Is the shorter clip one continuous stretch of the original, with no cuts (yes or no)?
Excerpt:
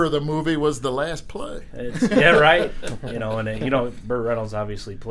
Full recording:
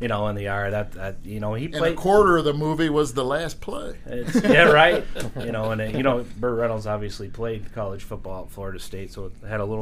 yes